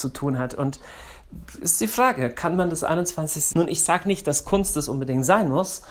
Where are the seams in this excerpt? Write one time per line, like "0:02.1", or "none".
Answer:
0:03.5